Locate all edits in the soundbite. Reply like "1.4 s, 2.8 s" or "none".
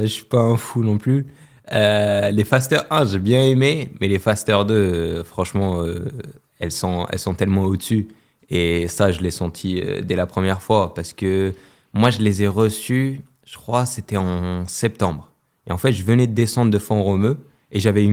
none